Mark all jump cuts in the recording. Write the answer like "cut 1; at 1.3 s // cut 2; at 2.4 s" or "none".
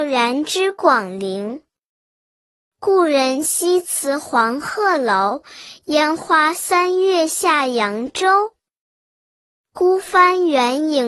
none